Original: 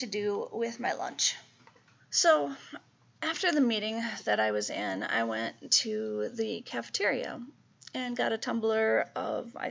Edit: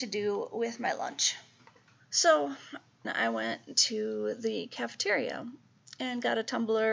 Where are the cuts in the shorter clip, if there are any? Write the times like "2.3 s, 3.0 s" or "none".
3.0 s

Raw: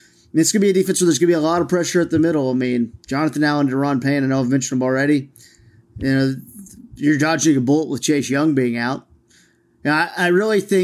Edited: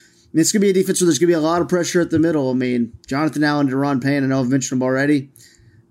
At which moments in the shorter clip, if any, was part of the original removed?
none

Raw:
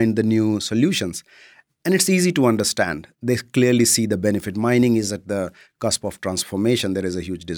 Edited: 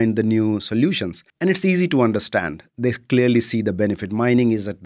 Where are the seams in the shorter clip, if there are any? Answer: 1.3 s

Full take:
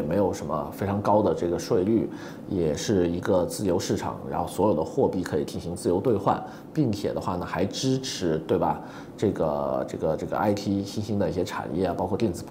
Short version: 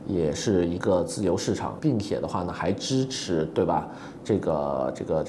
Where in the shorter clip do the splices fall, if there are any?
1.8 s

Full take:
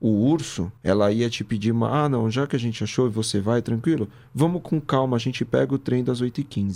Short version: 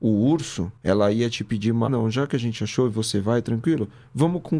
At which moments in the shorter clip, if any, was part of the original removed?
1.9 s

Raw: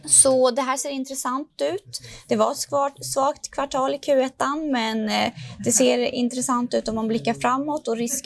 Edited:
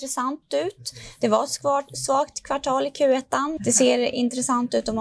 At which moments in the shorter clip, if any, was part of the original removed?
3.6 s

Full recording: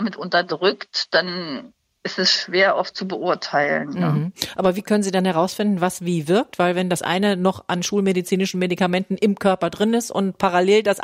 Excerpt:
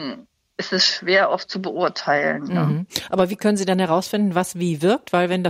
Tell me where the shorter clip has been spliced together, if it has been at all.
none

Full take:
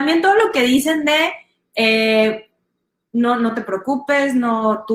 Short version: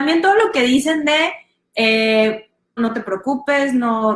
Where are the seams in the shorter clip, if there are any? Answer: 2.8 s

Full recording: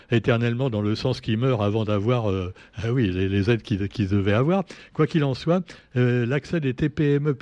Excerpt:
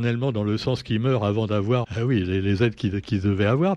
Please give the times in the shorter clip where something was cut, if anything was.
1.8 s

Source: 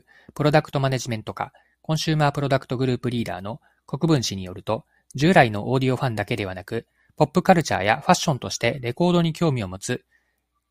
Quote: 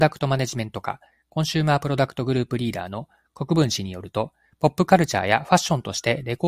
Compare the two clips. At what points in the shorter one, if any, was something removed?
4.5 s

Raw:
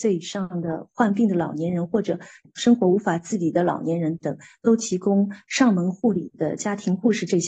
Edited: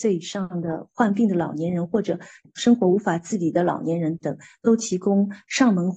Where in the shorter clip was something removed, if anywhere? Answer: none

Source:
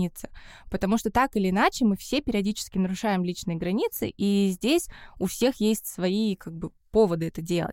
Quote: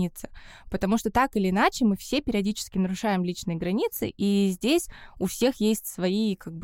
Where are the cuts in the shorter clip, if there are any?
none

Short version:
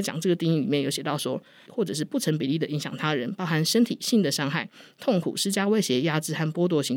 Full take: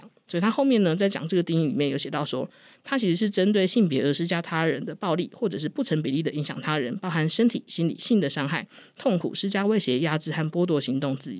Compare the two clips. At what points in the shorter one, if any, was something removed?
1.7 s, 4.0 s

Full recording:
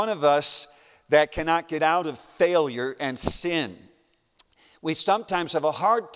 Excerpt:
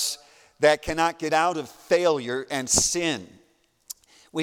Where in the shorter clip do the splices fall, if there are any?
none

